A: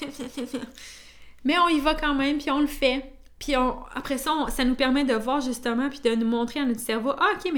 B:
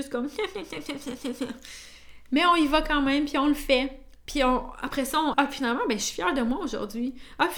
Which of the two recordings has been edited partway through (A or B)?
B